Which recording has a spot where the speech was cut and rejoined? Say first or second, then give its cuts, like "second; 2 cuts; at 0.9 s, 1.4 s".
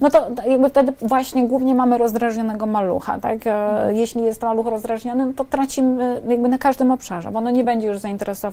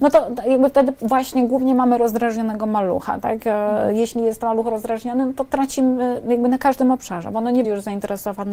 second; 1 cut; at 7.6 s